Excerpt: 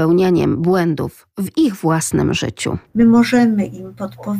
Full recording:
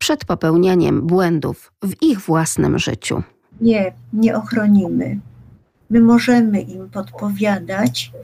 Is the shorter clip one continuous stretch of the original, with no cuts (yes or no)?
no